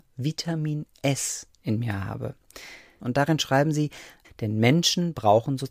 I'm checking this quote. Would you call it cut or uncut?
cut